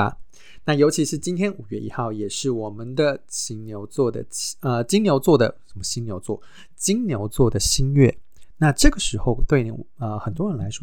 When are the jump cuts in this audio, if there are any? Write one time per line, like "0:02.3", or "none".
none